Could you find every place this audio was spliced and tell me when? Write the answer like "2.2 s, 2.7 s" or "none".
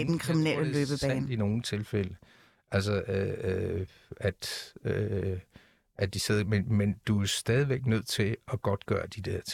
none